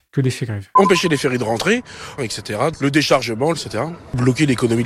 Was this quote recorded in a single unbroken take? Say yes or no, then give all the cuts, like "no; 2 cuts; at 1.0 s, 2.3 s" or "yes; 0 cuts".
no; 2 cuts; at 2.2 s, 3.5 s